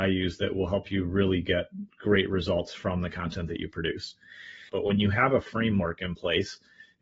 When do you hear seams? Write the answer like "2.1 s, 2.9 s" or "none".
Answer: 4.7 s